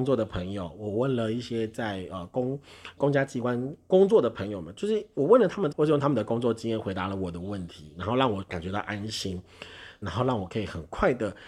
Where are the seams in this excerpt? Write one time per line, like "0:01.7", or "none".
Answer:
0:03.0
0:05.7
0:10.0